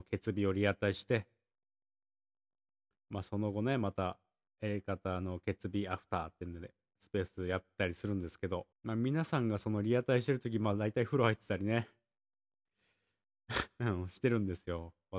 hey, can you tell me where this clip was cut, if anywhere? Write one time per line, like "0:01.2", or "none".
0:08.7